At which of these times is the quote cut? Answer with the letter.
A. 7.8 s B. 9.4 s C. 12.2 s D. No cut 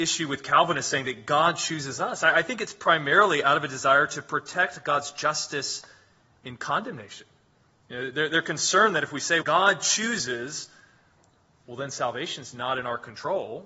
B